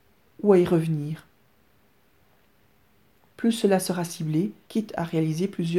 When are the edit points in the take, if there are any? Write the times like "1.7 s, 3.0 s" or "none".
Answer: 4.7 s